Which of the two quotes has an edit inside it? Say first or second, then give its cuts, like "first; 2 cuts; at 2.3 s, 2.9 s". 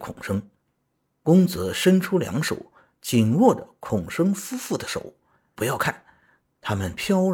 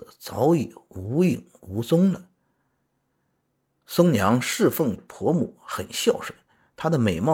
first; 1 cut; at 5.5 s